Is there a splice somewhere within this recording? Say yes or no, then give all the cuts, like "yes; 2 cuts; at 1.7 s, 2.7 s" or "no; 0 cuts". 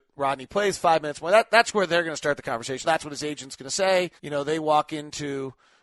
yes; 2 cuts; at 2.8 s, 4.2 s